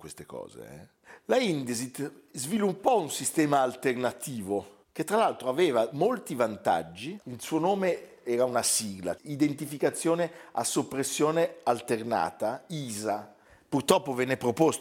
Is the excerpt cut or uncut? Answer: cut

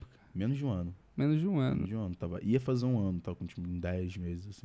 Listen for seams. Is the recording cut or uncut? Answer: uncut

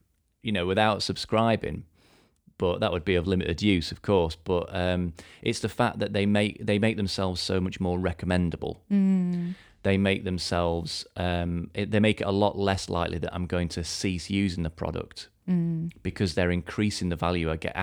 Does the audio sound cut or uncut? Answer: uncut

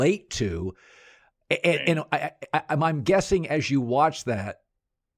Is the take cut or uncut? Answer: uncut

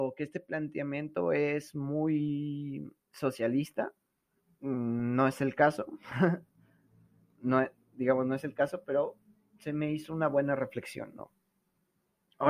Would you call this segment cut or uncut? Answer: uncut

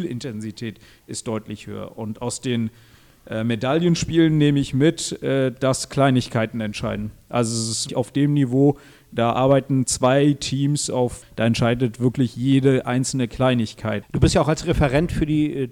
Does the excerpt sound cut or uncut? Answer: cut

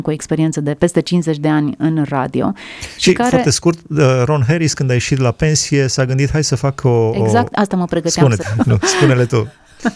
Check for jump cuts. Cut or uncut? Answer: cut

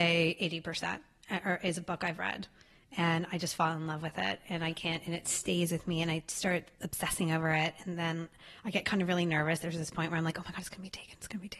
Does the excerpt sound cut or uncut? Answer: uncut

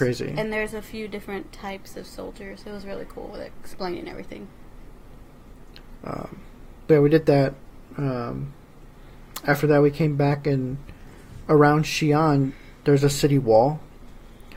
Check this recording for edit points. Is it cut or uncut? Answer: uncut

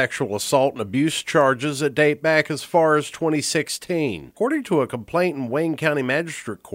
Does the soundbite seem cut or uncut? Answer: uncut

